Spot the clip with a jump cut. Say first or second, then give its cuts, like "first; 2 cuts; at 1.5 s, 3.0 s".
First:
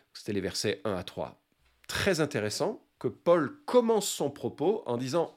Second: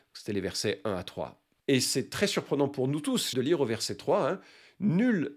second; 2 cuts; at 1.6 s, 3.3 s